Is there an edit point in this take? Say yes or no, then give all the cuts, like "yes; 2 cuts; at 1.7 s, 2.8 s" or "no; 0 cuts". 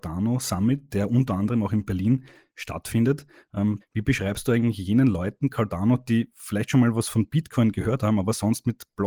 yes; 1 cut; at 3.8 s